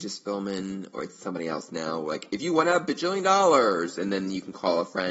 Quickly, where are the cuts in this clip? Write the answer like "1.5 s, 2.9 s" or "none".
none